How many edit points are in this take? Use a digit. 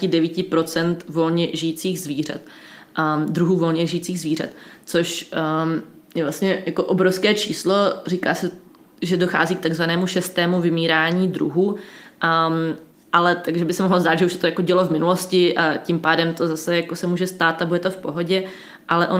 0